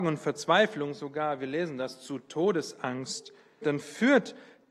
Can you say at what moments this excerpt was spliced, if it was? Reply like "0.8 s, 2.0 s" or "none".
3.6 s

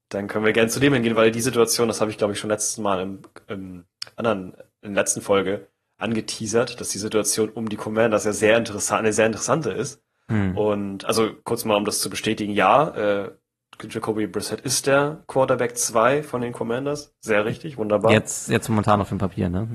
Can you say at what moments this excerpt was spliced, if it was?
none

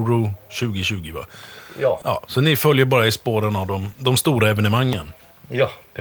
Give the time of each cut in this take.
2.0 s

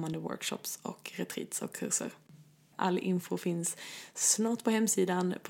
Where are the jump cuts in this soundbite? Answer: 2.7 s

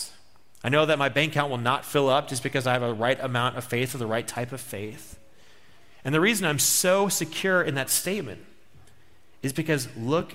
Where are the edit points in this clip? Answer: none

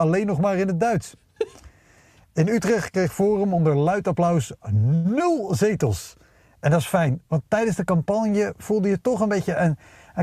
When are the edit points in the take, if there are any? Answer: none

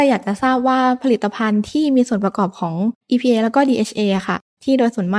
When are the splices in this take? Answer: 3.0 s

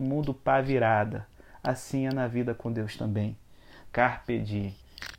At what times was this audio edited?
3.9 s

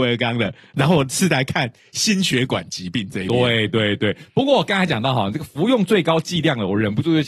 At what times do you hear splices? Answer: none

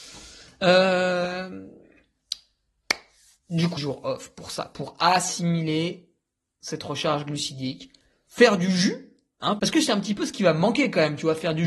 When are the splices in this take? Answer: 3.8 s, 9.6 s

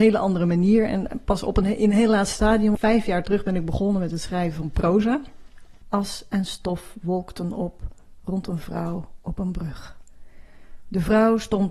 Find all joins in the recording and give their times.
2.7 s, 5.8 s

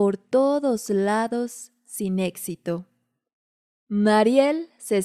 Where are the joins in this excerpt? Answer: 3.8 s

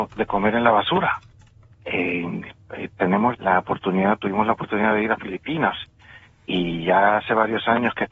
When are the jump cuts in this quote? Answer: 1.7 s, 3.3 s

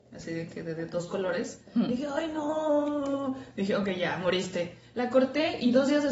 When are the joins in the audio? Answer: none

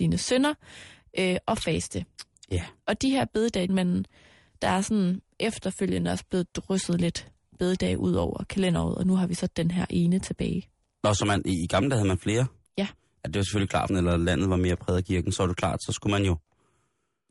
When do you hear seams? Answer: 3.7 s, 13.9 s

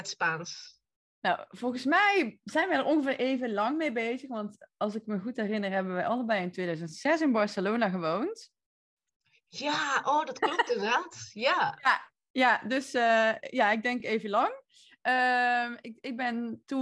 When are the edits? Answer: none

